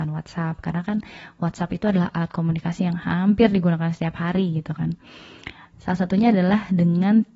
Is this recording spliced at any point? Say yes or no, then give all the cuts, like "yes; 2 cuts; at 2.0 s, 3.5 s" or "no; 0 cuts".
no; 0 cuts